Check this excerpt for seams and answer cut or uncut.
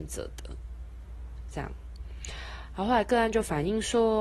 cut